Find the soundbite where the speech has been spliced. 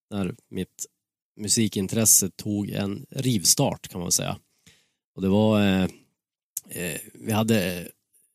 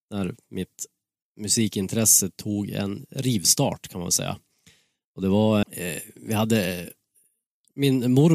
second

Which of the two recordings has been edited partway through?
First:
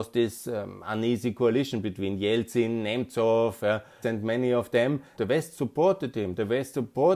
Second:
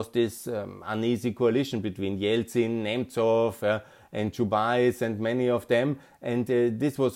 first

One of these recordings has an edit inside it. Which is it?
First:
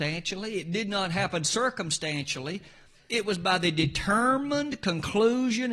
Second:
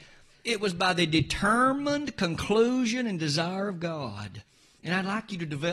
second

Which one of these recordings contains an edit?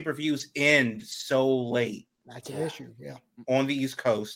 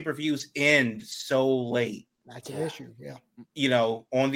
first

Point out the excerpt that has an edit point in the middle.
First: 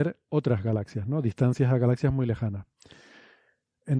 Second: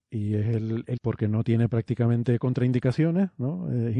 second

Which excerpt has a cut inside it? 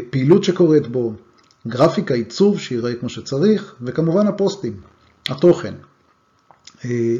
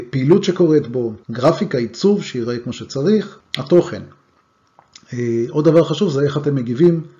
second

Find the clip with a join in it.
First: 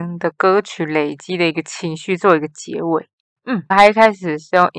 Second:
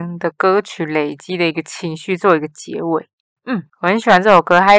first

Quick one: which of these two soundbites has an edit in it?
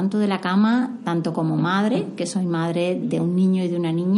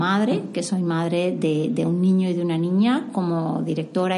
first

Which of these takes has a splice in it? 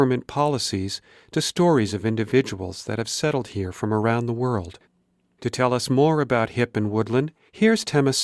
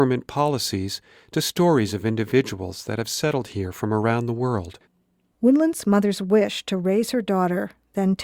second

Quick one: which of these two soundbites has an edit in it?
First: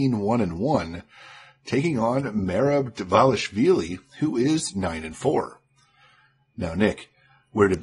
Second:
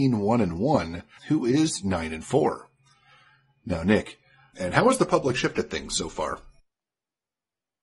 second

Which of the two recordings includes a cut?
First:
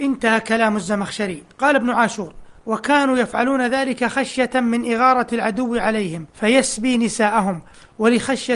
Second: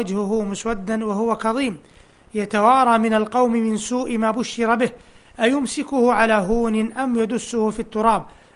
first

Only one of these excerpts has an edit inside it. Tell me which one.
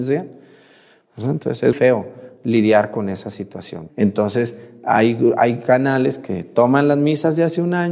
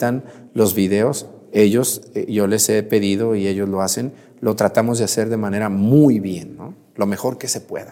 first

